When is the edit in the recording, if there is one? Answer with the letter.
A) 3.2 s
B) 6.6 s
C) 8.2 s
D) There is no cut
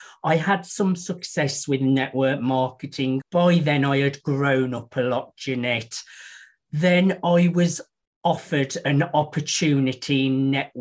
A